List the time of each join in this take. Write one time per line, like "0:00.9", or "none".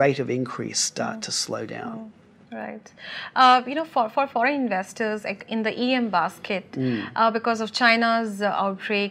none

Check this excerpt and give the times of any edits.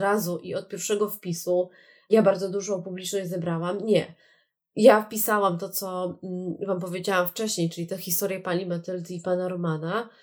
none

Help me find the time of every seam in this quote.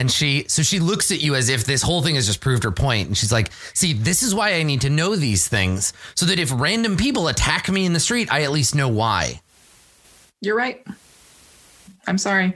none

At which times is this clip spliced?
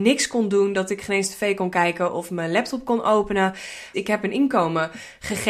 0:03.9

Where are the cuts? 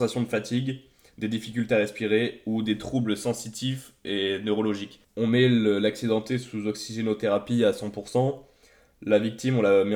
0:05.0

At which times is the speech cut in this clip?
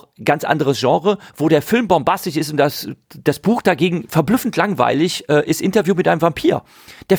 none

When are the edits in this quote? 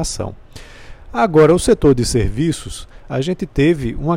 none

